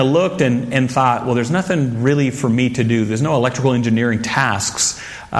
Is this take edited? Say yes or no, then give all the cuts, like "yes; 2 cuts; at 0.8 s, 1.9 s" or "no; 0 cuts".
no; 0 cuts